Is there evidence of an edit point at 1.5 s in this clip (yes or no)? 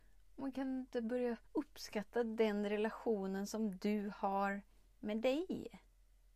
yes